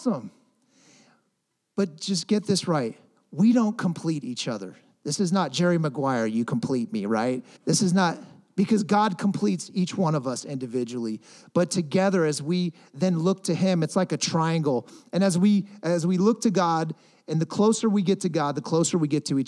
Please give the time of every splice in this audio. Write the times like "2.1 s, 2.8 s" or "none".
7.6 s